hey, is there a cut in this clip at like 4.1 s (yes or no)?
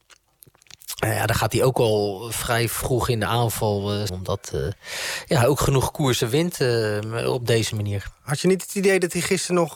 yes